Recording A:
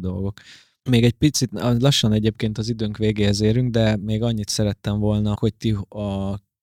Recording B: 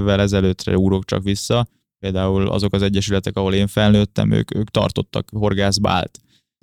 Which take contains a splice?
A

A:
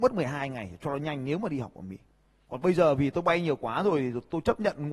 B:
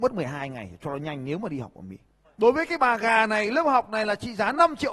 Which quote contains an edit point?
B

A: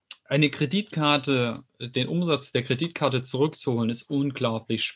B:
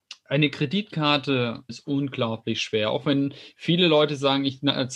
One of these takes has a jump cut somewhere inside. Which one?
B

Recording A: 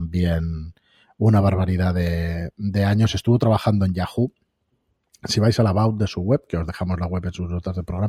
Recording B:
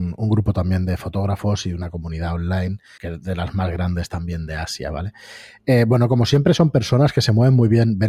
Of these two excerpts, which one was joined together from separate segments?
B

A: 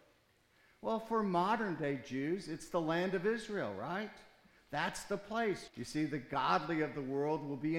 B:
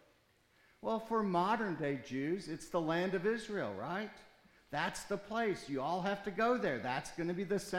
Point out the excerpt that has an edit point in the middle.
A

